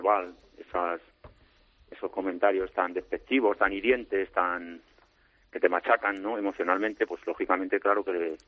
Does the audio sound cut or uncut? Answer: uncut